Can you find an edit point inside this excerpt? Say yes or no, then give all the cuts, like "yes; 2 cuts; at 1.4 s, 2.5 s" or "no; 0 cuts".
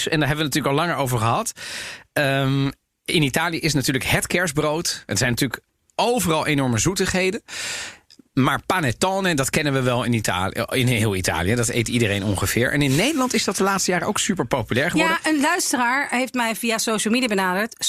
no; 0 cuts